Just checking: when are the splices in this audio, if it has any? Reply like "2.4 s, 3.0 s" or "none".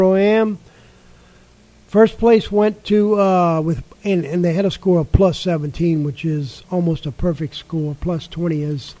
none